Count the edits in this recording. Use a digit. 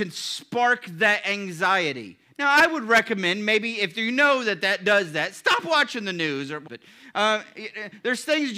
1